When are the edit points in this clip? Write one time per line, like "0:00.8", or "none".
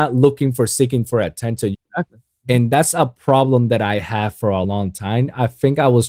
0:01.7
0:04.6